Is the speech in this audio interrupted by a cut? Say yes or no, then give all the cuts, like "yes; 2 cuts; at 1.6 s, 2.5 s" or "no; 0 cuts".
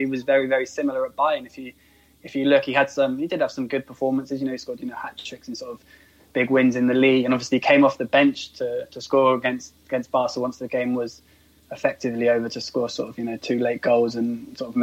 no; 0 cuts